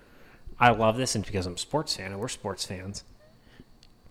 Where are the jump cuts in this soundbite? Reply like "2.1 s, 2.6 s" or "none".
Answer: 1.2 s

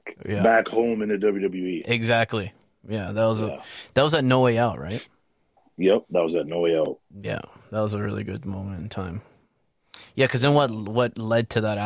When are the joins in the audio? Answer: none

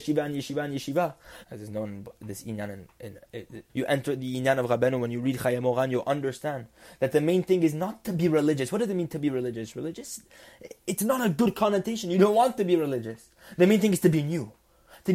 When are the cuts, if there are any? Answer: 1.4 s, 3.7 s

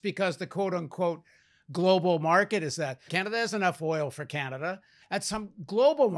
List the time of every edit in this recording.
3.1 s, 5.0 s

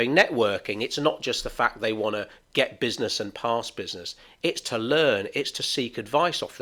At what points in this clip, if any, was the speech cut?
none

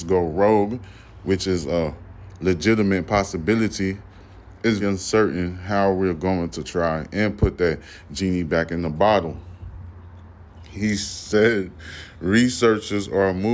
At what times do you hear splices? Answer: 4.8 s

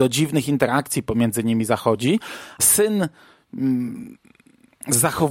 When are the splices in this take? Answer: 2.6 s

